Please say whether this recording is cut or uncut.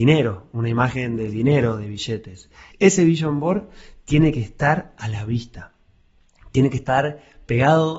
cut